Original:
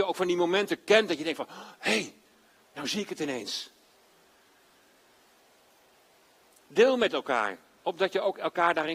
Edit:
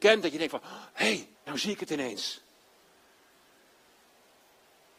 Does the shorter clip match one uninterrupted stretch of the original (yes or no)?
no